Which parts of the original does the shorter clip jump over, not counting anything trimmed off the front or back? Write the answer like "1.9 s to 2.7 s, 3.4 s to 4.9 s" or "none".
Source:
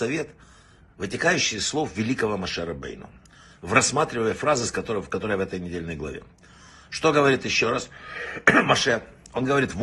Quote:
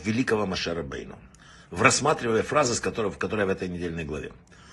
none